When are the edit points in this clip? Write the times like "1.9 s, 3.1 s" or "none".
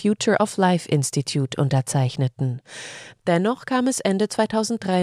3.2 s

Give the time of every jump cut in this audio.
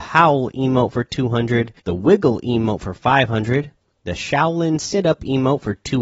1.8 s

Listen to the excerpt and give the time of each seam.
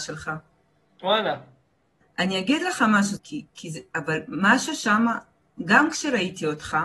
2.0 s, 3.2 s

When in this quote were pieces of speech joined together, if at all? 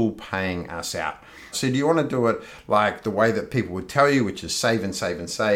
1.5 s

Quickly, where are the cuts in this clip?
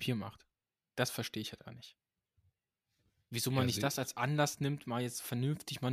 1.7 s

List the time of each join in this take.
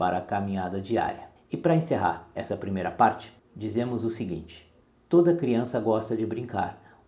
1.4 s

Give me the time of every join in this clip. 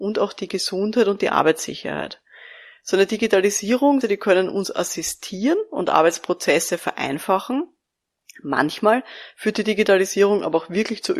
4.0 s

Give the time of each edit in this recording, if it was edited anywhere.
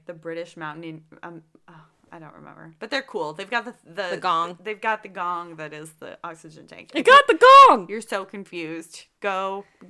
none

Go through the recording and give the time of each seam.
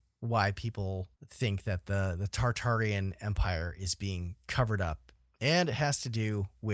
1.2 s

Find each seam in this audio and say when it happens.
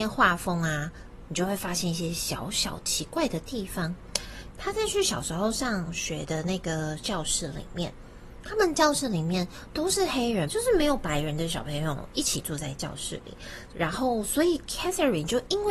4.5 s, 10.5 s, 13.7 s

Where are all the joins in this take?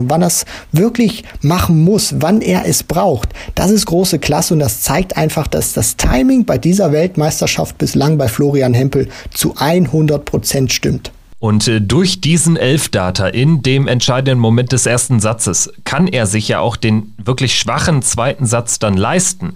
none

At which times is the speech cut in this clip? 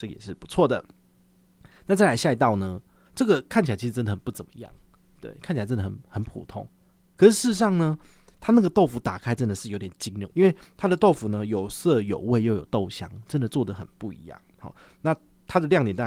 3.1 s, 10.3 s

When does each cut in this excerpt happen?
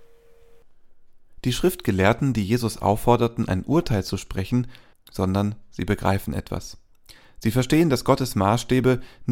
4.9 s

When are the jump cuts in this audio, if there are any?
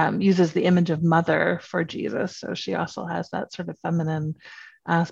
none

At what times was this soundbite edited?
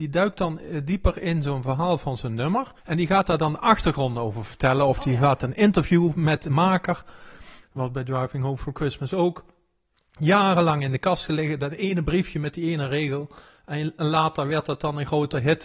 2.8 s, 7.6 s

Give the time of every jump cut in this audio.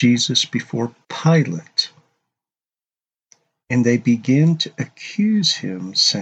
none

